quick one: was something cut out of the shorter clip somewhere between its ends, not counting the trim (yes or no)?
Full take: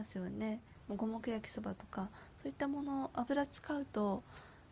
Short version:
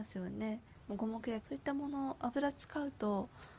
yes